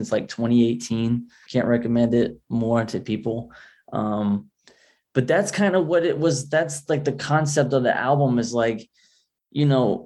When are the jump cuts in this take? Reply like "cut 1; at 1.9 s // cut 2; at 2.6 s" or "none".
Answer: cut 1; at 1.5 s